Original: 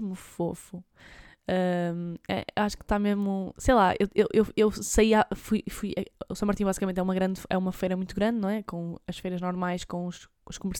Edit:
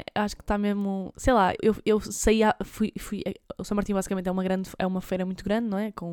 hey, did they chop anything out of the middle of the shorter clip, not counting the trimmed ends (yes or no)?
yes